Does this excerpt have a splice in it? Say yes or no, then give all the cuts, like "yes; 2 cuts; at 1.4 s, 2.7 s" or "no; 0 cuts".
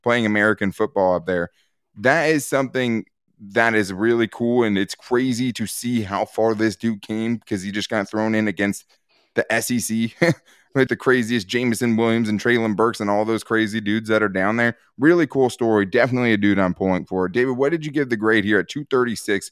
yes; 1 cut; at 10.9 s